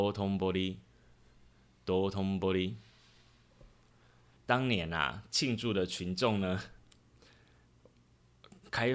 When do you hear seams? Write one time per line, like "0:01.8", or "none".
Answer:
0:04.4